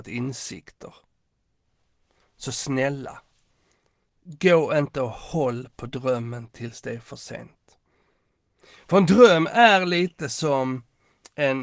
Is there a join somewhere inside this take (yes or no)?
no